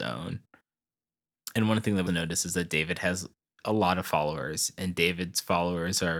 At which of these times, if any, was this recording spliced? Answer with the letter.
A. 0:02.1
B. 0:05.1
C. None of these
A